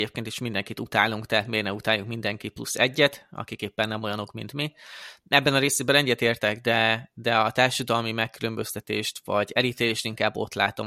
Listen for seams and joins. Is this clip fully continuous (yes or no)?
yes